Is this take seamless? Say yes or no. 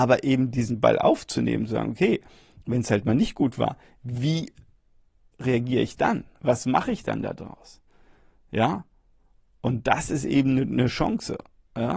yes